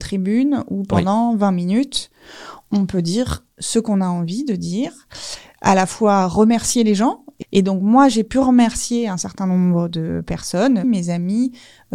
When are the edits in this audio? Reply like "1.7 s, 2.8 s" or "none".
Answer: 7.4 s, 10.8 s